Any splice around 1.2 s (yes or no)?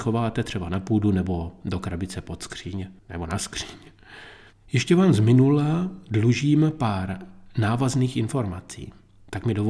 no